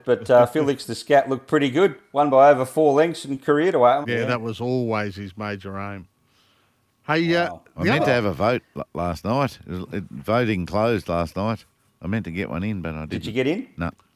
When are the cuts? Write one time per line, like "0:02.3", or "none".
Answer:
0:04.0